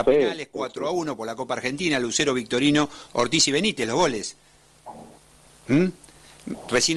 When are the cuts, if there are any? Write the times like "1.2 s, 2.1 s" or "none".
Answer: none